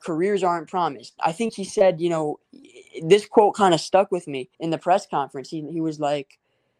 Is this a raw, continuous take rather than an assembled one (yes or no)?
no